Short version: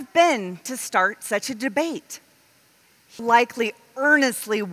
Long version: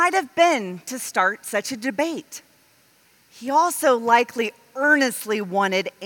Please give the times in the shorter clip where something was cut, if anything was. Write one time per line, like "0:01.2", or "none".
0:03.2